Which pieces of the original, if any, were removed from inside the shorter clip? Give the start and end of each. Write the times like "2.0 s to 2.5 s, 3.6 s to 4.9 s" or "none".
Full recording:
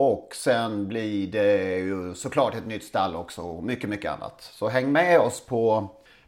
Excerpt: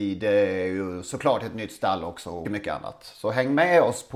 3.6 s to 3.8 s